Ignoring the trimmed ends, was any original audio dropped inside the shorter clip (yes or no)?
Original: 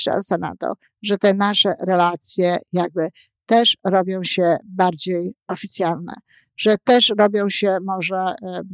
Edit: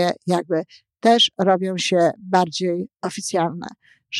no